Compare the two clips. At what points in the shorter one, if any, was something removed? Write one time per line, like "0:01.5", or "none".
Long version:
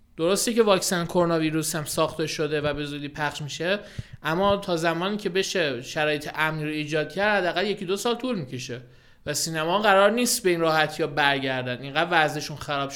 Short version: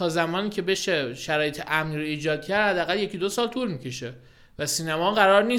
none